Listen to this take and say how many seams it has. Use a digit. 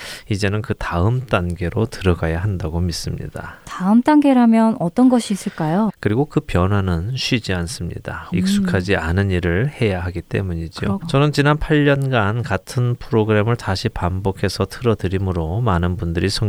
3